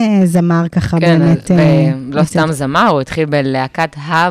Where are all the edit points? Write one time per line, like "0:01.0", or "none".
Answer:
none